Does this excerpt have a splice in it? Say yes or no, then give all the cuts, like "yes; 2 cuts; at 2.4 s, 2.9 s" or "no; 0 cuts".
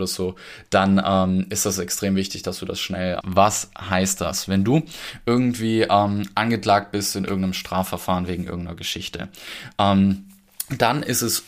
yes; 1 cut; at 3.2 s